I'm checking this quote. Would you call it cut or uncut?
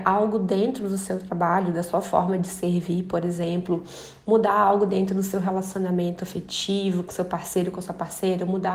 uncut